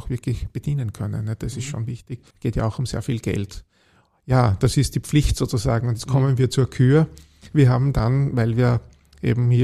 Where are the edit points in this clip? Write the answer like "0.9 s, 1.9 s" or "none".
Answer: 2.3 s